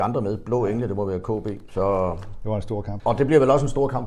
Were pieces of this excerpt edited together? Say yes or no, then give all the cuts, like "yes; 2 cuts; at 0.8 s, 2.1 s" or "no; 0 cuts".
yes; 2 cuts; at 1.7 s, 3.0 s